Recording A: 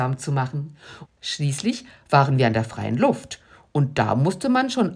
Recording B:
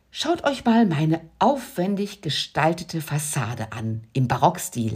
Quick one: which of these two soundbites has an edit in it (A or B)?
A